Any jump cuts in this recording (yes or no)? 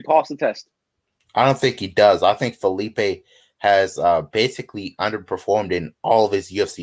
no